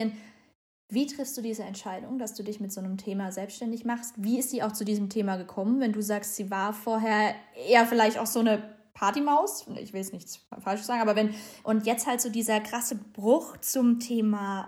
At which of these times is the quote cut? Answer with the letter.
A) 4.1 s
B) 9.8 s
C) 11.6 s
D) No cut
C